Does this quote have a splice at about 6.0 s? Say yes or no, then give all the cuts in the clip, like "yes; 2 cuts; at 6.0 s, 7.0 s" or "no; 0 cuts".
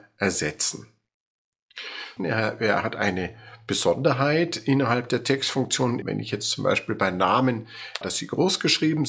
yes; 3 cuts; at 2.2 s, 6.0 s, 8.0 s